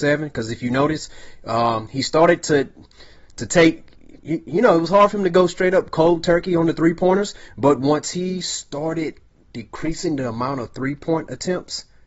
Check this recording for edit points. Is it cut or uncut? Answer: uncut